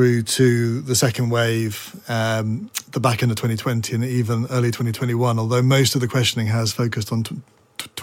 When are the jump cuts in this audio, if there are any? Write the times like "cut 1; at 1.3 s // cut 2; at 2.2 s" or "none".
none